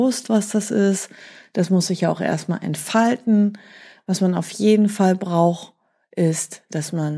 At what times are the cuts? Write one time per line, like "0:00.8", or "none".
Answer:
none